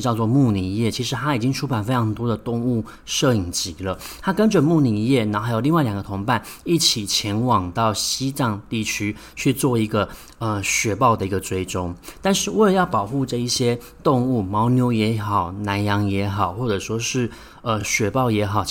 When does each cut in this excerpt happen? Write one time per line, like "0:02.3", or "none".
none